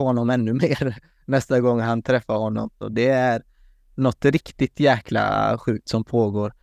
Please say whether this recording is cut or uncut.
cut